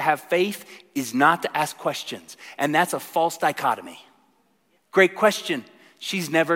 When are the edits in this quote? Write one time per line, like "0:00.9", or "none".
0:04.8